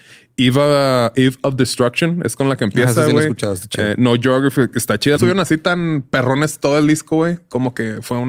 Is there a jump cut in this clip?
yes; 1 cut; at 5.2 s

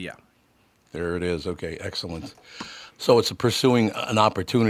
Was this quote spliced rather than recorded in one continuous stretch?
yes; 1 cut; at 2.9 s

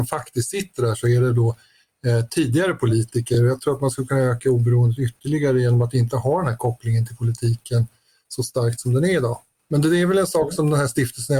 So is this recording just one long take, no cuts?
yes; 0 cuts

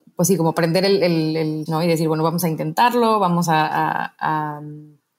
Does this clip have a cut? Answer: yes; 1 cut; at 1.7 s

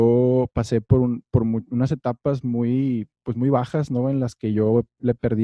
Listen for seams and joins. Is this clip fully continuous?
yes; 0 cuts

